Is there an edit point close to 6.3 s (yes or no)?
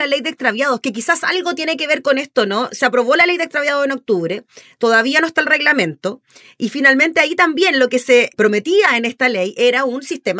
no